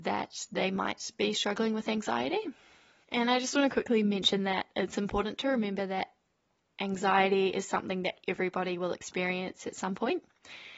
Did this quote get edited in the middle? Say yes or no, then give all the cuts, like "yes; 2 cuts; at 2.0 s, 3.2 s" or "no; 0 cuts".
no; 0 cuts